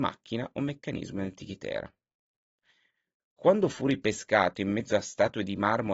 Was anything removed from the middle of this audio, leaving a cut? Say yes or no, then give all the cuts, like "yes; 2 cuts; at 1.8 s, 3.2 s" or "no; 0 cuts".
no; 0 cuts